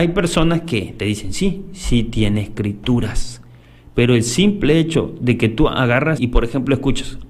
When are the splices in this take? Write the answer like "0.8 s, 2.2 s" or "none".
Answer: 6.2 s